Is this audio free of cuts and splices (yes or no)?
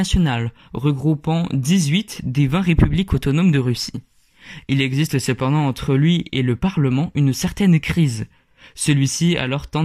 yes